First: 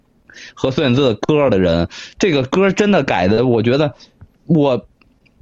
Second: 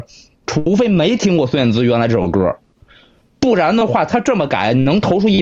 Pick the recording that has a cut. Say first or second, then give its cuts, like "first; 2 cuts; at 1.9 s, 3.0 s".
first; 1 cut; at 4.3 s